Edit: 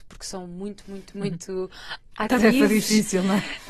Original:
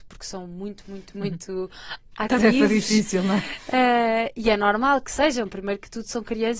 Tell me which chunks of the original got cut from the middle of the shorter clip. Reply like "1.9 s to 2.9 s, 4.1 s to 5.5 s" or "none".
none